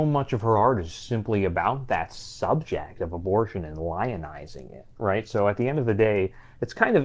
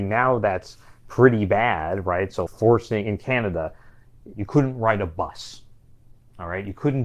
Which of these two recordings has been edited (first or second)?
second